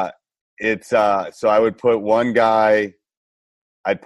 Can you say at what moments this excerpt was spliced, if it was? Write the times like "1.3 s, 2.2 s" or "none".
none